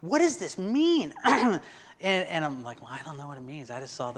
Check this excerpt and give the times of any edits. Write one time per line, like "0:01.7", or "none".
none